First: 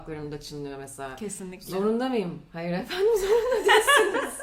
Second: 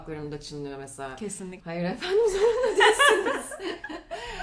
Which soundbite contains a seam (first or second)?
second